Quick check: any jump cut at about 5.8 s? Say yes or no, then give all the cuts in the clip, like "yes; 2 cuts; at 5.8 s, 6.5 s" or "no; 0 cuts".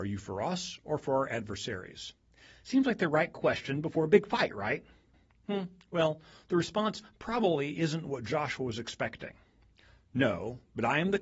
no; 0 cuts